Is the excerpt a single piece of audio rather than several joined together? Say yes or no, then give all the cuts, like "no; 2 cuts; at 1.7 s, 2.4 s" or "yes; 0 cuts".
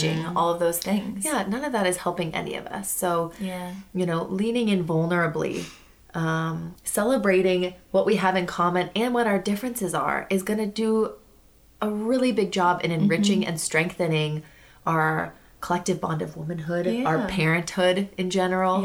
no; 1 cut; at 6.8 s